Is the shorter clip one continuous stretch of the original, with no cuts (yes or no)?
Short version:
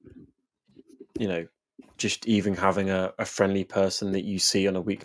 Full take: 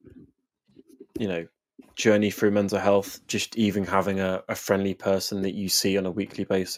no